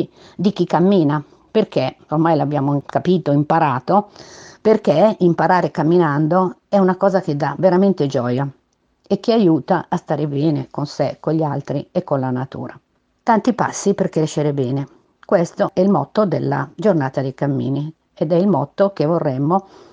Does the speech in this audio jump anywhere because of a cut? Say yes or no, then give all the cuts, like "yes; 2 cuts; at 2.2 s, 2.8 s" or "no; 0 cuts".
no; 0 cuts